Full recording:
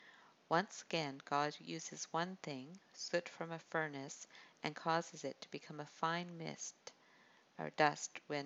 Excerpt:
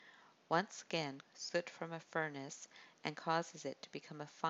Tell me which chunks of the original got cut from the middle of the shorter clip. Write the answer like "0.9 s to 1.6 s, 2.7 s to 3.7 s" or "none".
1.2 s to 2.8 s

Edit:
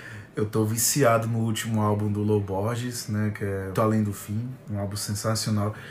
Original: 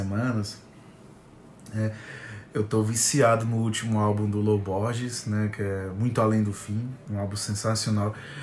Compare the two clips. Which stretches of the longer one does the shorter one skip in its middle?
5.9 s to 6.1 s

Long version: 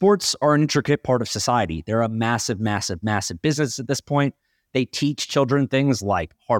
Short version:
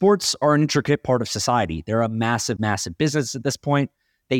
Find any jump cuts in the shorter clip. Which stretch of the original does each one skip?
2.6 s to 3.0 s

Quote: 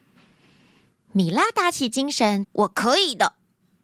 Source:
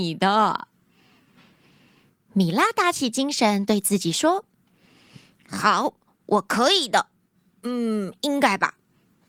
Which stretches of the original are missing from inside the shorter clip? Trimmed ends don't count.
3.6 s to 6.2 s

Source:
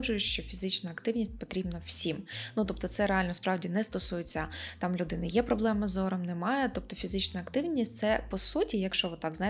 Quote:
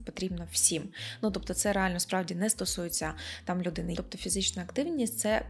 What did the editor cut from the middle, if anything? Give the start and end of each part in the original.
5.3 s to 6.7 s

